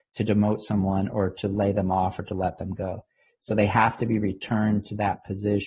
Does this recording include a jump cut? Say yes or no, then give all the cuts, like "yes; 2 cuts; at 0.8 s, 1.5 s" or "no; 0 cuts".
no; 0 cuts